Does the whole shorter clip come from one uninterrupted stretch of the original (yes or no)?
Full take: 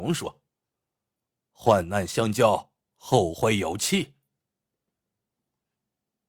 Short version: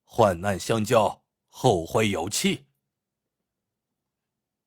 yes